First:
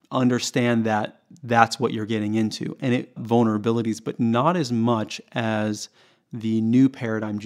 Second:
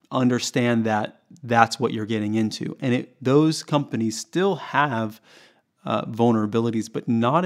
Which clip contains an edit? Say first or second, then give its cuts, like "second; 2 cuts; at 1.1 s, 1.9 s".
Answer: first; 1 cut; at 3.2 s